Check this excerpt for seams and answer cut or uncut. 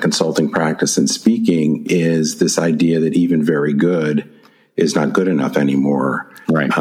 uncut